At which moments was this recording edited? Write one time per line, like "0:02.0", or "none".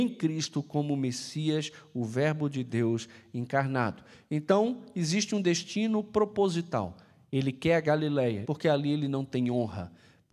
0:08.4

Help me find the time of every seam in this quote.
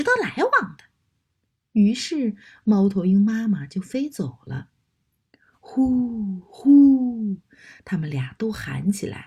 none

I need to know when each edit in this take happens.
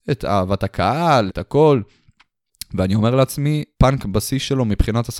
0:01.3
0:03.7

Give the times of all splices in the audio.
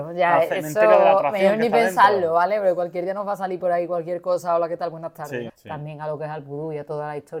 0:05.5

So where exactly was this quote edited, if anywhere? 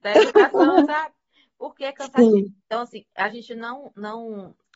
none

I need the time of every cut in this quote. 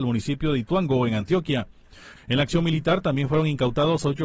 0:02.2

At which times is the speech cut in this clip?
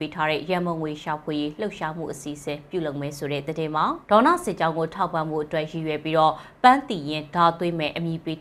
0:04.0

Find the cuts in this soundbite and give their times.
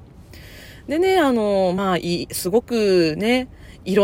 none

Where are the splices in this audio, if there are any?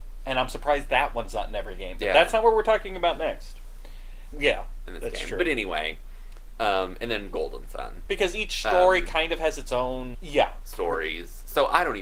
0:04.3
0:08.1
0:10.1

